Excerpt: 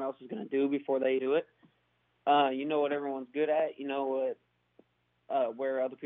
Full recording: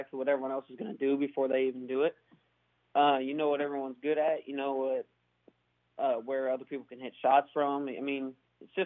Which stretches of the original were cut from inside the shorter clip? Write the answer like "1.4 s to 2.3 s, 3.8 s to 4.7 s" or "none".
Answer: 1.7 s to 1.9 s